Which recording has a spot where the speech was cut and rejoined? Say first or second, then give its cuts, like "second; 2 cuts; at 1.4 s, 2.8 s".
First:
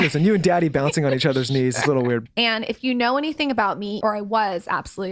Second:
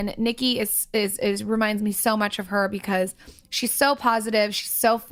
first; 2 cuts; at 2.3 s, 4.0 s